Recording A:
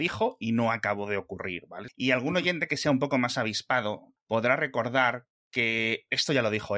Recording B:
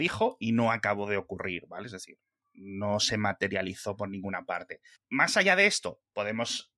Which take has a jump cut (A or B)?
A